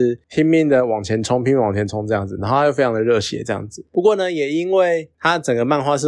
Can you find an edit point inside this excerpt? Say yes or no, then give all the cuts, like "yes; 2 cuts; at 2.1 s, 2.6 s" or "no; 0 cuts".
no; 0 cuts